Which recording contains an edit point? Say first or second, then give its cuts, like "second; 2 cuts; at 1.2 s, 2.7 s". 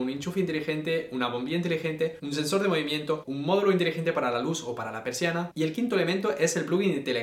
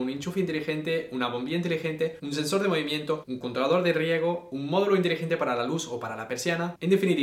first; 2 cuts; at 3.3 s, 5.5 s